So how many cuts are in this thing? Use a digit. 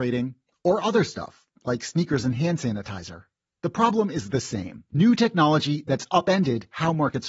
1